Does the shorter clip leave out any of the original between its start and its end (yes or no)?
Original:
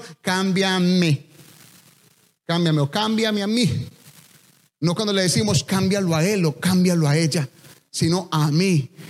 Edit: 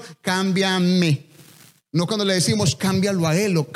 yes